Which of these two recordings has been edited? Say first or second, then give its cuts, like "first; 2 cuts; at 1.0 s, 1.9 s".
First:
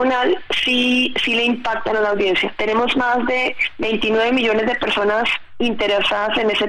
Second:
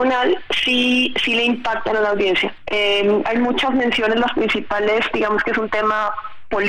second; 1 cut; at 2.6 s